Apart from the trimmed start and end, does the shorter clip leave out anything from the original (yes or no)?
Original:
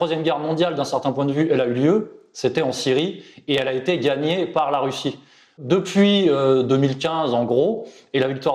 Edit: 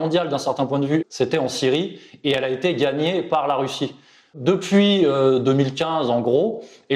yes